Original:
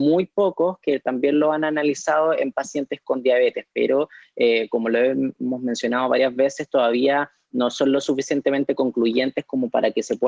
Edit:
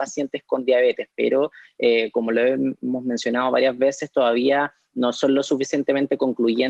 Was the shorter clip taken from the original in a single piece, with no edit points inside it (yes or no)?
yes